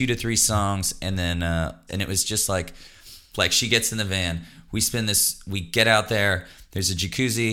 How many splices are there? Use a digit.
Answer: 2